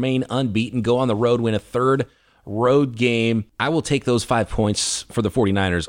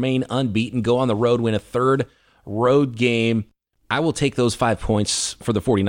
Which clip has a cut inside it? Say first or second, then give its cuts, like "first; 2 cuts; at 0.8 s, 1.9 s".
first; 1 cut; at 3.5 s